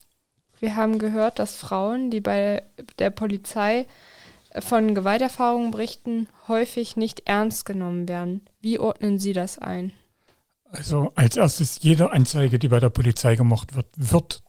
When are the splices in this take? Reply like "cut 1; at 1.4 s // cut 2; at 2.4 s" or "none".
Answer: none